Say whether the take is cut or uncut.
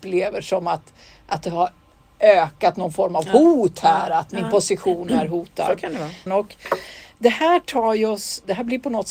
cut